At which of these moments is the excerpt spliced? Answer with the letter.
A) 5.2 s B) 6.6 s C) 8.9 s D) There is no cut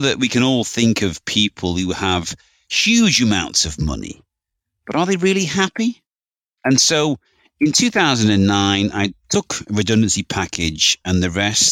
B